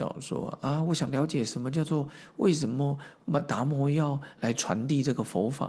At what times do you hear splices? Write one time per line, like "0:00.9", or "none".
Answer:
none